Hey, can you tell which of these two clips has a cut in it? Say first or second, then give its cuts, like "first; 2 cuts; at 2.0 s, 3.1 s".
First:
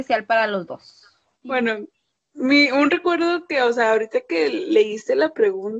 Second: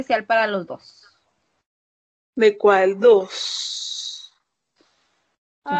first; 1 cut; at 1.4 s